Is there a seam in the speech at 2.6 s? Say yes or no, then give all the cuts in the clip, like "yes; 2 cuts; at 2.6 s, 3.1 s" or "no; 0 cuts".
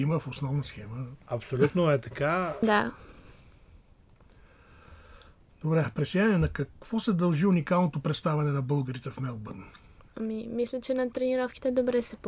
yes; 2 cuts; at 2.6 s, 10.1 s